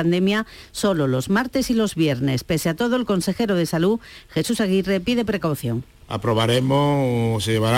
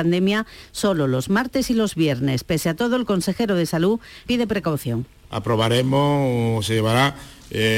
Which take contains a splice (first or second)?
second